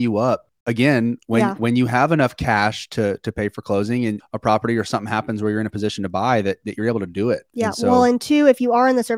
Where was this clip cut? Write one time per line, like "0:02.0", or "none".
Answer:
0:04.2